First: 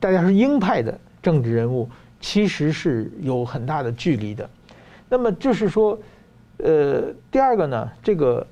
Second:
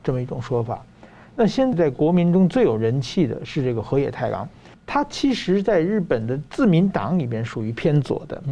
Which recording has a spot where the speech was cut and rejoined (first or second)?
second